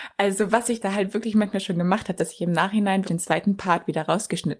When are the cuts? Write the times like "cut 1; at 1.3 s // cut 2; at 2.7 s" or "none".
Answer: cut 1; at 3.0 s